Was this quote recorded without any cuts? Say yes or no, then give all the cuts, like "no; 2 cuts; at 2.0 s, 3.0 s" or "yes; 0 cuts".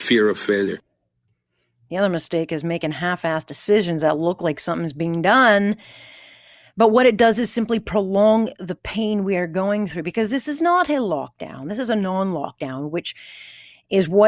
yes; 0 cuts